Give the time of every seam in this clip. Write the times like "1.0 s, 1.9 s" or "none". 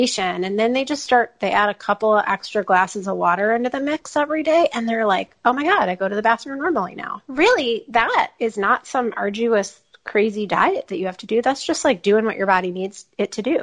7.3 s